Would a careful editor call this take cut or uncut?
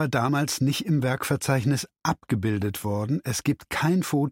uncut